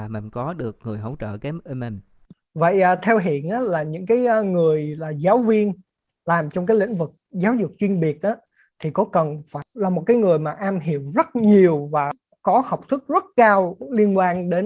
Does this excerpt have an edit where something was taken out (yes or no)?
no